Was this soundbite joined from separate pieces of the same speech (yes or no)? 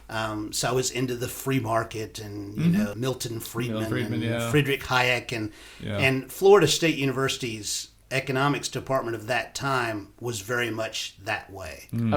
yes